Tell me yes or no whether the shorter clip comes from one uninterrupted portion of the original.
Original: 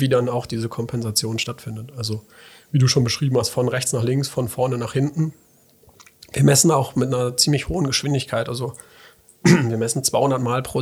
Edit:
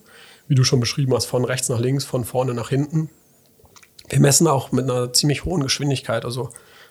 yes